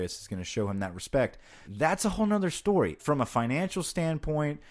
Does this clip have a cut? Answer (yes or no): yes